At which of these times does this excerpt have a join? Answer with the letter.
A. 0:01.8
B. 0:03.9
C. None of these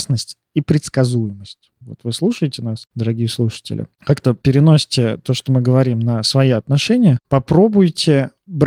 A